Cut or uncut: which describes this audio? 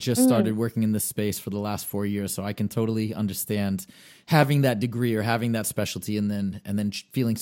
uncut